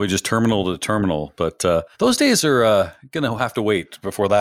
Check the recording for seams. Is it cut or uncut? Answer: cut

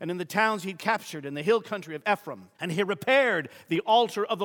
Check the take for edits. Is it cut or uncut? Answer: cut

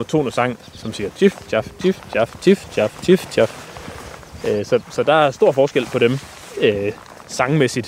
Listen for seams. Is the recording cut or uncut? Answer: uncut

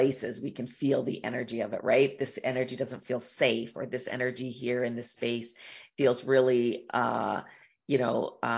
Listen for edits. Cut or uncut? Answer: uncut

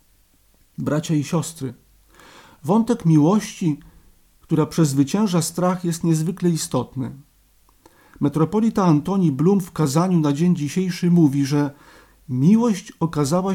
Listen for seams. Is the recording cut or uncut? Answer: uncut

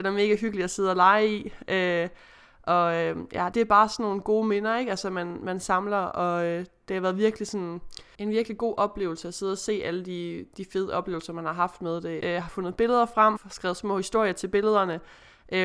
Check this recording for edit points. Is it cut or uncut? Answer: cut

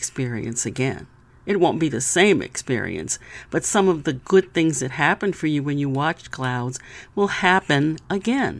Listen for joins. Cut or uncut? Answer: uncut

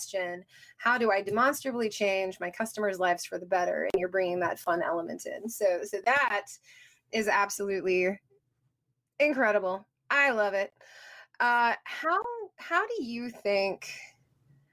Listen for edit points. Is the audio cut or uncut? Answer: uncut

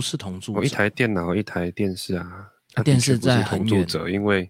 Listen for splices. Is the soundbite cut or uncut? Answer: uncut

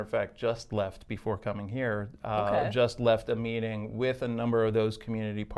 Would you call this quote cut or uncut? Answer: uncut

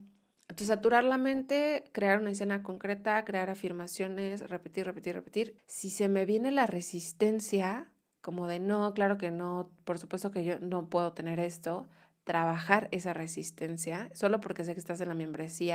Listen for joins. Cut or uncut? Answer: cut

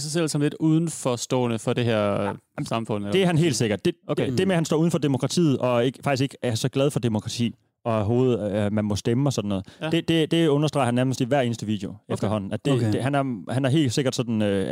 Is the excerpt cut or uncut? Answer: uncut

